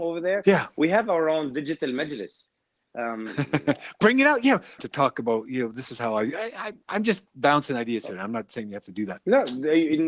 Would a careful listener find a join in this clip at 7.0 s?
no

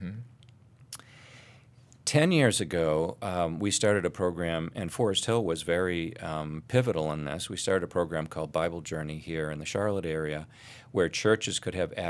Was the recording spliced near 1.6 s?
no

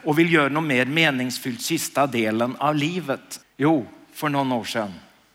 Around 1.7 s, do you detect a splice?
no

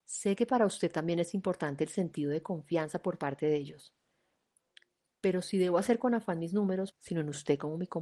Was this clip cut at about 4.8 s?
no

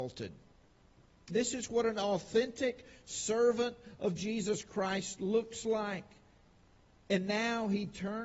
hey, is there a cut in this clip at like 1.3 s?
yes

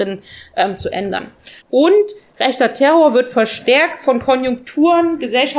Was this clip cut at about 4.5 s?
no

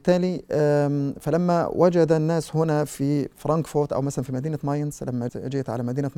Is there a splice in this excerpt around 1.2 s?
no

